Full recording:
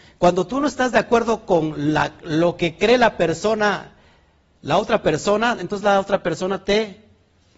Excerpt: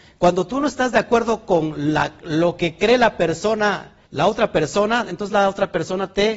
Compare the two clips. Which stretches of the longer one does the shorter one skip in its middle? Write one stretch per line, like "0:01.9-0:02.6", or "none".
0:04.1-0:04.6